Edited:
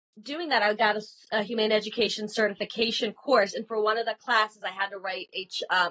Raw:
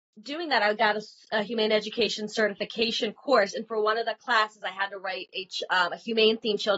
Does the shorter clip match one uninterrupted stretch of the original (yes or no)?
yes